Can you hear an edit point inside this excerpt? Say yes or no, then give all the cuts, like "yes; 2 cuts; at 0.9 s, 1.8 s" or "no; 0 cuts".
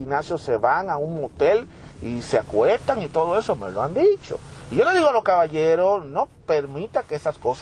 no; 0 cuts